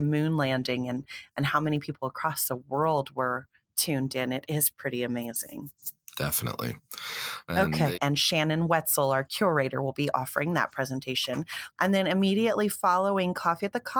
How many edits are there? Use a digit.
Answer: 2